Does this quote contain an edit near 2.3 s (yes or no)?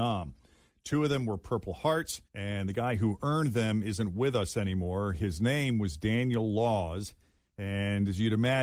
yes